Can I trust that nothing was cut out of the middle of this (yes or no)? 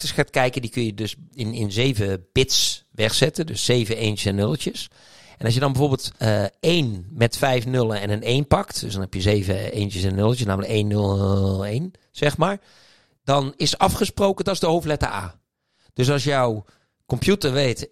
no